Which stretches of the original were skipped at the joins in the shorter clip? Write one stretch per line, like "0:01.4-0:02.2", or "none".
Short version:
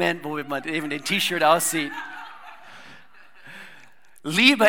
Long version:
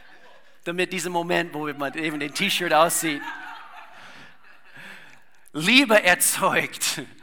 none